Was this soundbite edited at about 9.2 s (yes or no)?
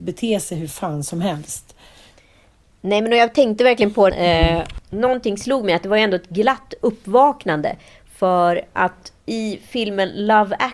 yes